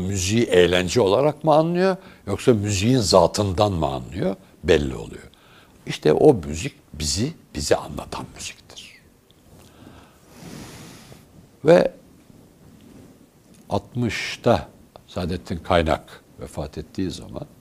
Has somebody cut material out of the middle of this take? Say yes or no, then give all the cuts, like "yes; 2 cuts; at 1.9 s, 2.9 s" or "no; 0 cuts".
no; 0 cuts